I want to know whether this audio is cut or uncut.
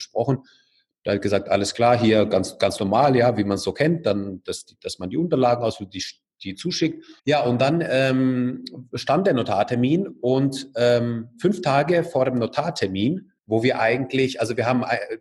cut